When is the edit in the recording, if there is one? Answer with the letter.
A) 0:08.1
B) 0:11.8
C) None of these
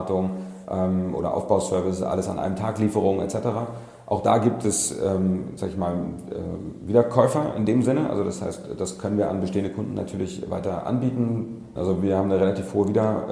B